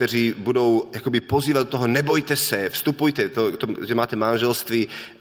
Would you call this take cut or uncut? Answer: uncut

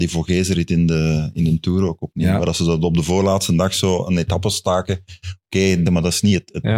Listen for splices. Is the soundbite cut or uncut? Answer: cut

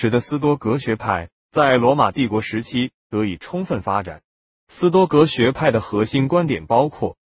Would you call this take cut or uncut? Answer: uncut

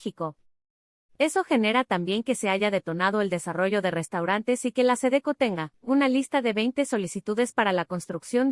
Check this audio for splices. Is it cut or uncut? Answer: cut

